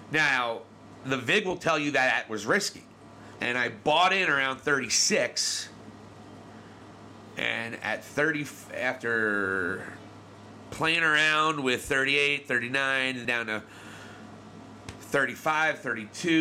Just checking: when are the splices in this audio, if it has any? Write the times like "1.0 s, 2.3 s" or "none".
3.4 s, 13.2 s